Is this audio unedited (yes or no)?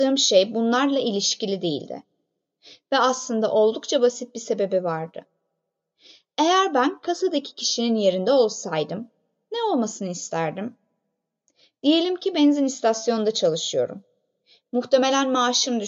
yes